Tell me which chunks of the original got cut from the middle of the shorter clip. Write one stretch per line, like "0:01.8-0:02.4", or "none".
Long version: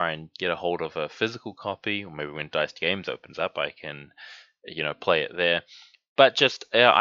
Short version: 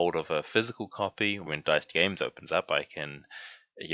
0:02.1-0:02.3